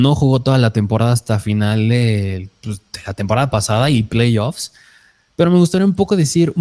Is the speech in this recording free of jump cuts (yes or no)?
yes